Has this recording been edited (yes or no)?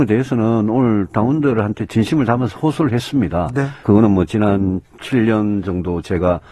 yes